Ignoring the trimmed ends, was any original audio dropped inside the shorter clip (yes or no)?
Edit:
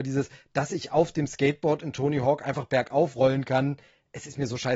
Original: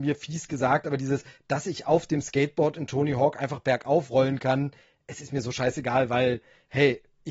no